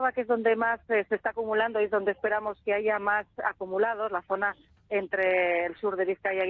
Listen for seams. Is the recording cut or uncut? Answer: uncut